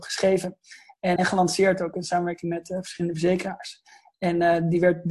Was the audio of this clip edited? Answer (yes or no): yes